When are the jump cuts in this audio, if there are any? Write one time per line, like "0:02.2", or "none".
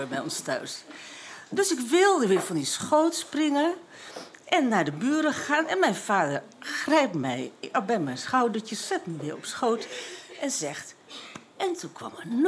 none